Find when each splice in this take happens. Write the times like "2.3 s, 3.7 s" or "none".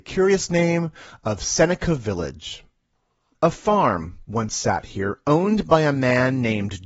none